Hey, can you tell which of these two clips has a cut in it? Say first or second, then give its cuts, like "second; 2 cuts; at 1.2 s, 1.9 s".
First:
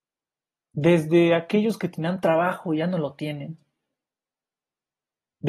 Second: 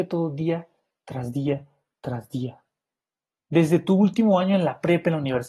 second; 1 cut; at 3.4 s